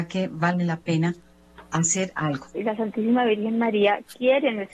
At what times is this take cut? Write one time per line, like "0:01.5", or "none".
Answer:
0:02.5